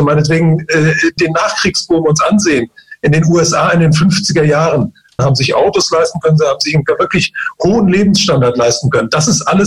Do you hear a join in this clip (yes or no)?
yes